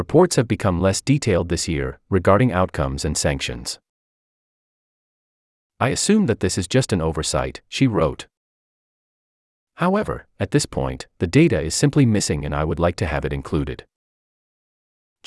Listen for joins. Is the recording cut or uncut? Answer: uncut